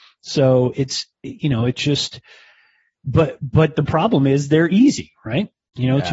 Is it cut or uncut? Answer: uncut